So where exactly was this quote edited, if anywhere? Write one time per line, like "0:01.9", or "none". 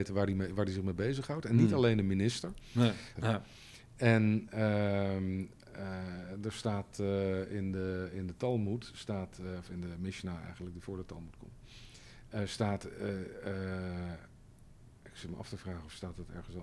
0:03.2